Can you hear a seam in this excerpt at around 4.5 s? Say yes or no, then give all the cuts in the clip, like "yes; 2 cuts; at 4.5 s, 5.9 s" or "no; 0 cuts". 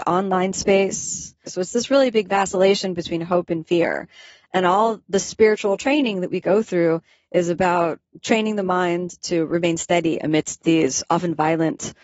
no; 1 cut; at 1.5 s